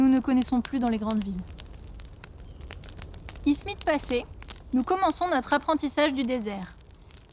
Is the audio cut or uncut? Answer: uncut